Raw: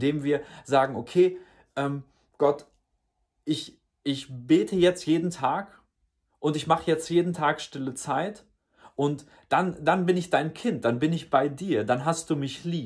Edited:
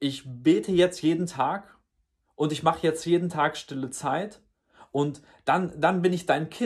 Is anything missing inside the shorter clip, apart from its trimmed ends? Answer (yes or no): no